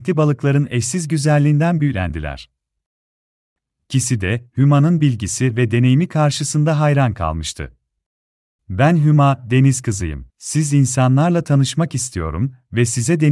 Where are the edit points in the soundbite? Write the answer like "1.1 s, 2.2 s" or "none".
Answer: 3.8 s, 8.6 s, 10.3 s